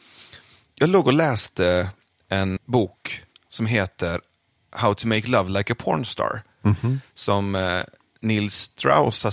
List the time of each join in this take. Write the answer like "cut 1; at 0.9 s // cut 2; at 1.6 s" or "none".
cut 1; at 2.6 s